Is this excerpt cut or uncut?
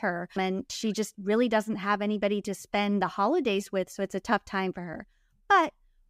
uncut